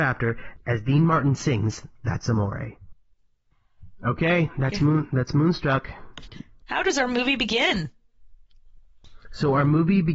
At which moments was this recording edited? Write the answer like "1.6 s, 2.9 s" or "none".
none